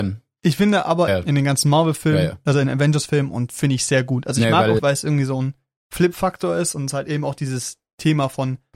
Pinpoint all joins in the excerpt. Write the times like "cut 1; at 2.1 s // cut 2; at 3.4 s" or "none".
cut 1; at 1.1 s // cut 2; at 4.8 s